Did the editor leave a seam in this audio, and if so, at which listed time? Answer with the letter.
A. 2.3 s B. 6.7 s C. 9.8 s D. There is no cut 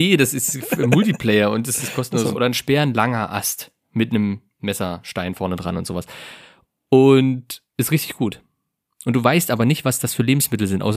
A